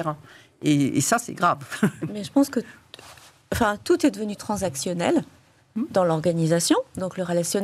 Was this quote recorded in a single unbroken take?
yes; 0 cuts

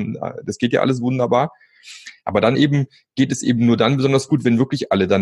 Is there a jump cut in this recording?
no; 0 cuts

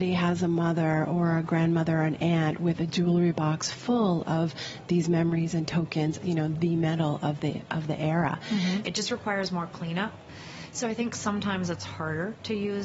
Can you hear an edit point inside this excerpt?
yes; 2 cuts; at 6.2 s, 8.8 s

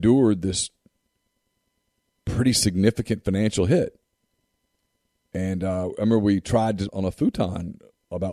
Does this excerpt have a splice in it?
yes; 1 cut; at 6.9 s

